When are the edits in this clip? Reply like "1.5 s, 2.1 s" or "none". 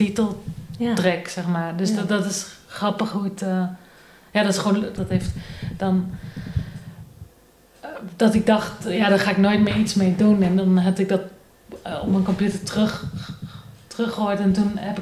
5.0 s